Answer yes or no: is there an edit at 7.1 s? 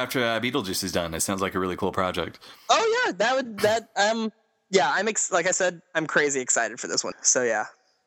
yes